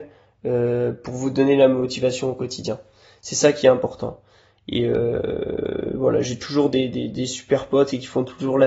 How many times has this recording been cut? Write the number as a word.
zero